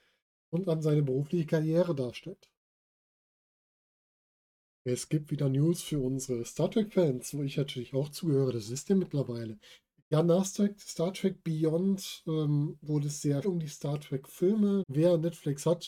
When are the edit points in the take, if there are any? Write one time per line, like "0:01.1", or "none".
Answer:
0:13.4
0:14.8